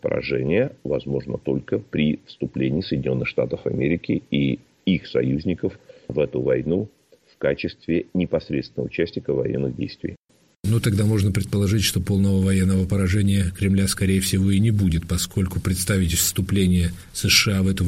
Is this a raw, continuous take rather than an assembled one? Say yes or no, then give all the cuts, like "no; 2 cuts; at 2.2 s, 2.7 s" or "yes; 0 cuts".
yes; 0 cuts